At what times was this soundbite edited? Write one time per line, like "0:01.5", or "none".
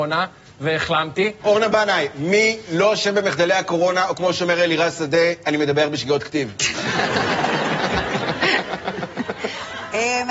0:01.4

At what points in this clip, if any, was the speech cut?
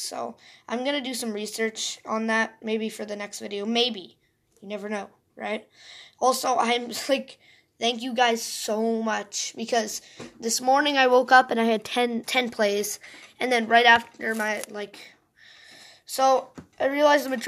0:12.2

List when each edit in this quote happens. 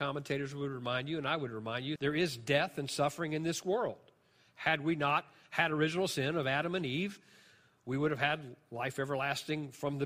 0:02.0

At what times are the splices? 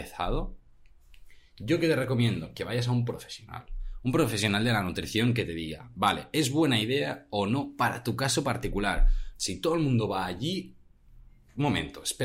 0:09.4

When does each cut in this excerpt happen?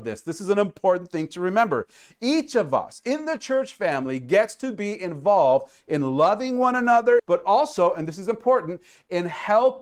0:07.2

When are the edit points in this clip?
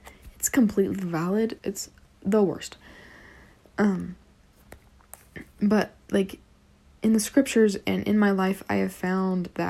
0:01.6

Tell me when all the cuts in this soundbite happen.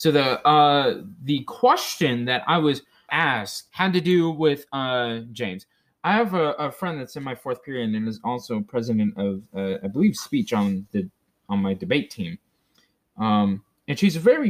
0:03.1

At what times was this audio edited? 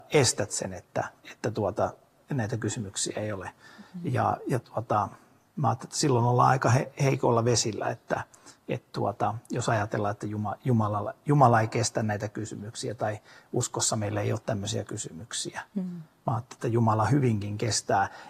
none

